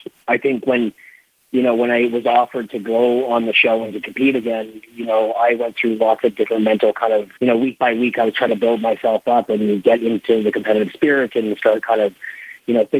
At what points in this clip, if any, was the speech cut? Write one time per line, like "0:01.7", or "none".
0:07.4